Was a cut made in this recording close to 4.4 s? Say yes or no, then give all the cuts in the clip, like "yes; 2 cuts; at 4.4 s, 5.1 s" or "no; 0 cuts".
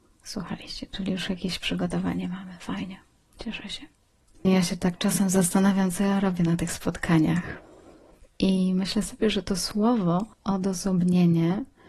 yes; 2 cuts; at 4.4 s, 10.3 s